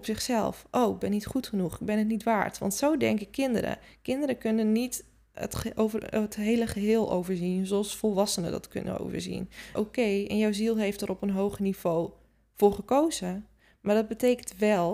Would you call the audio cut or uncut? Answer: cut